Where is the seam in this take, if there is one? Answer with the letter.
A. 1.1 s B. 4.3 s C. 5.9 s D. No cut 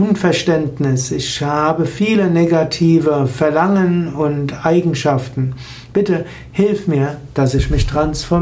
C